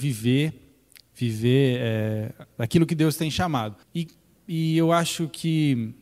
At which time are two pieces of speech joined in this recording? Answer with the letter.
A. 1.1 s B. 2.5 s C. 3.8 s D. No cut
C